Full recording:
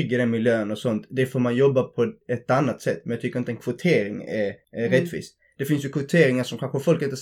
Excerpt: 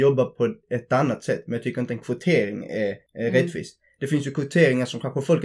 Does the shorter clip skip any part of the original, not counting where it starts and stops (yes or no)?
no